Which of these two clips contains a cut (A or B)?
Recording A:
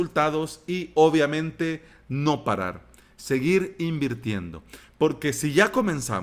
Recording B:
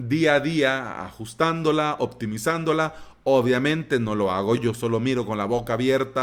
B